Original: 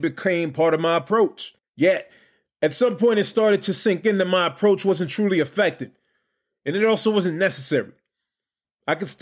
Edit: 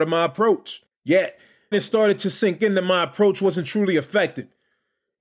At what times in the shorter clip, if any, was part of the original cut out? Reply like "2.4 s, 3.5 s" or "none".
1.7 s